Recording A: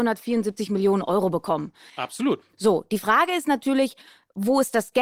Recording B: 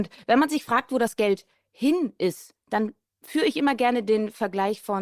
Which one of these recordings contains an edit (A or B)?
A